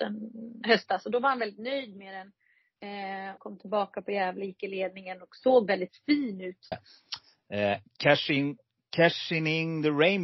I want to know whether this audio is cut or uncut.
cut